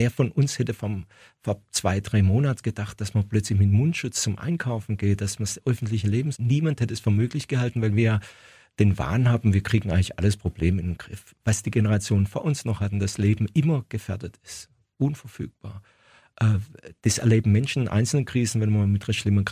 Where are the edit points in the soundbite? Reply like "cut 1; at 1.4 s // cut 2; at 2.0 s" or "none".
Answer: cut 1; at 6.3 s